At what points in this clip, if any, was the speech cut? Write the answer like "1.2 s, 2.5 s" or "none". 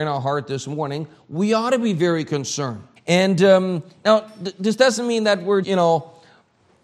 3.0 s, 5.6 s